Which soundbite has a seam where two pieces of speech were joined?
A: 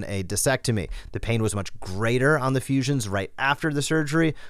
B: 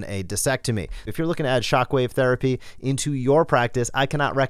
B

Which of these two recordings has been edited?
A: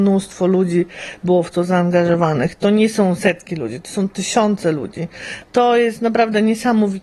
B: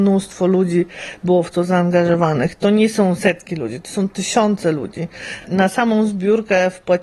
A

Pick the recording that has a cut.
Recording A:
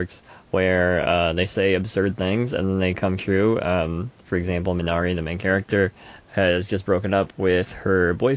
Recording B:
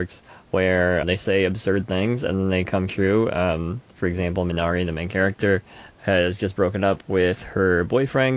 B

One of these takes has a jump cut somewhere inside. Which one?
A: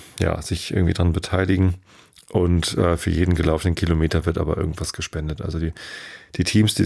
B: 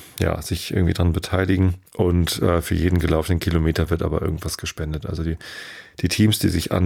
B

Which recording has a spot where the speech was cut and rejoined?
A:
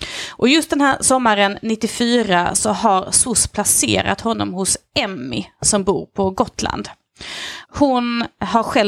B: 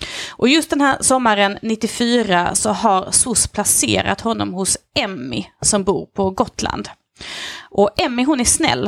A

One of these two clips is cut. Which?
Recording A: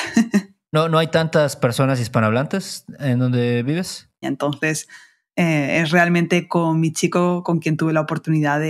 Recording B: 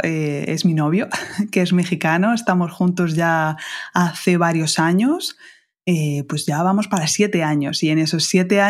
A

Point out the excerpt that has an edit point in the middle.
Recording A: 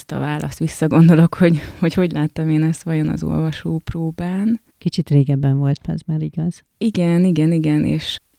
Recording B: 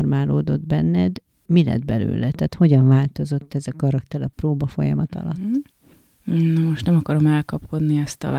A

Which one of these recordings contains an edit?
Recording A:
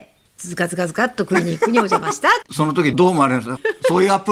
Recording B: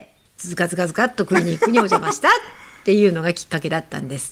A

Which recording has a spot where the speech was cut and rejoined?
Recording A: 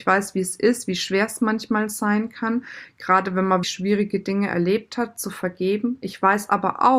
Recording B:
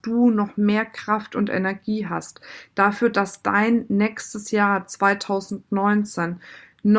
A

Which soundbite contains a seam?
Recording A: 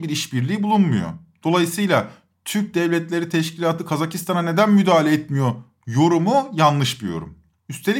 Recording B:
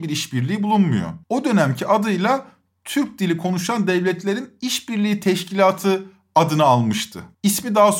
B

